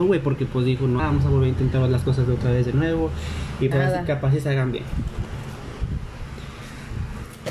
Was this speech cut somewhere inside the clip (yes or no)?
yes